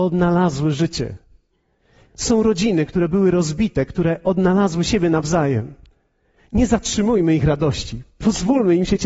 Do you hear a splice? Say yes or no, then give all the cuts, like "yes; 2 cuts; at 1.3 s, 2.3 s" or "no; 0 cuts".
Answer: no; 0 cuts